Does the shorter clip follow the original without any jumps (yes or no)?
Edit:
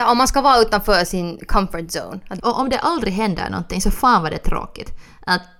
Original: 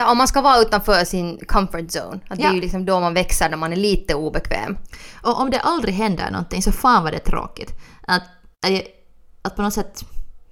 no